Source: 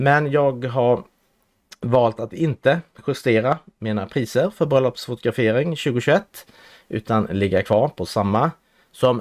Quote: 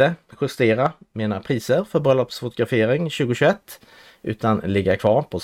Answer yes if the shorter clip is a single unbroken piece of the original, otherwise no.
yes